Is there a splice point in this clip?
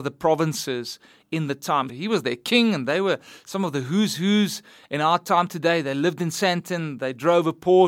yes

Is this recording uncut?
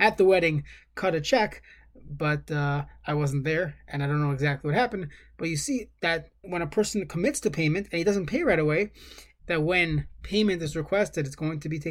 no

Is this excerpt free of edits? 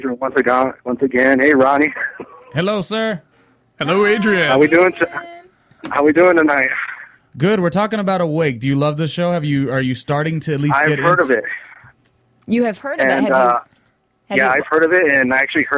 yes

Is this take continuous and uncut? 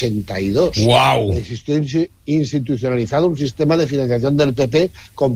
yes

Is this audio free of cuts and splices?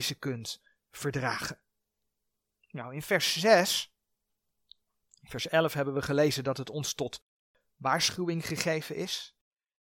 yes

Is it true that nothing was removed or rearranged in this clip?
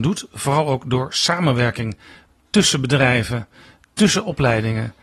yes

